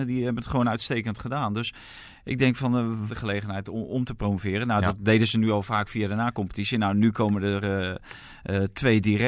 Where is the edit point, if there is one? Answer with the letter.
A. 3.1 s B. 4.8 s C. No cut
A